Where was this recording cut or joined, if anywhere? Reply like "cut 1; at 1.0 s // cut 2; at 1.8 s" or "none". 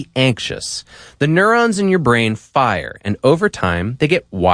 none